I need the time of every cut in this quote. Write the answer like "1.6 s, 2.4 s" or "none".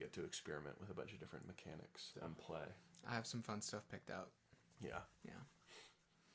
2.1 s